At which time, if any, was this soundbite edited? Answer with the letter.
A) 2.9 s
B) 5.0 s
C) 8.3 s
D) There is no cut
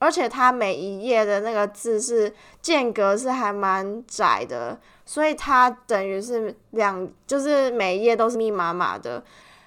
C